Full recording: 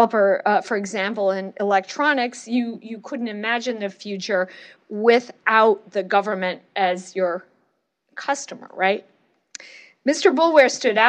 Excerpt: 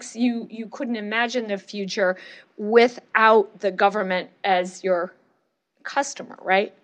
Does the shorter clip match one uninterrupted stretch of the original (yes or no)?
yes